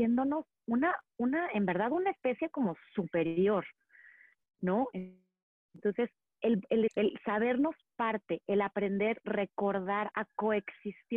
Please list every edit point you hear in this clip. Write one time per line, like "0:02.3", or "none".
0:06.9